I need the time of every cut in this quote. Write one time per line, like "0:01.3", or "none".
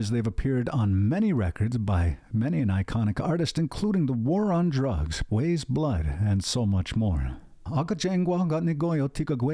0:05.3
0:07.7